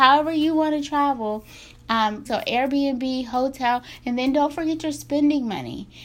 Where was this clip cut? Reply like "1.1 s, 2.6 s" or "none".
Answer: 2.3 s